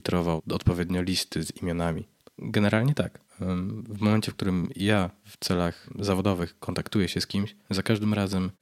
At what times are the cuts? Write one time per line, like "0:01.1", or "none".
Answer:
0:02.2